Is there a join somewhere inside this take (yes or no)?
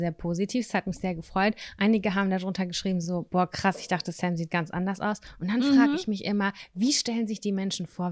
no